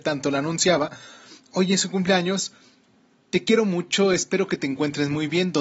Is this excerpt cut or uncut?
uncut